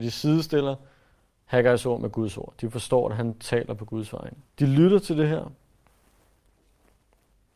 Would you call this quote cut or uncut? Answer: cut